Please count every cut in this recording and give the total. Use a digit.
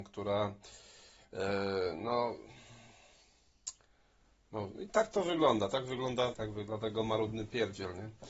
2